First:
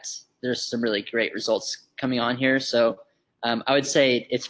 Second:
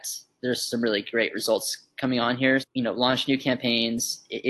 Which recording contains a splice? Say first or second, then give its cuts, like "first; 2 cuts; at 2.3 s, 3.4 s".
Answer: second; 1 cut; at 2.6 s